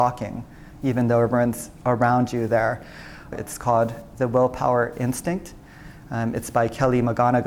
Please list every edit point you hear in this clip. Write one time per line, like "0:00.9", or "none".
0:03.3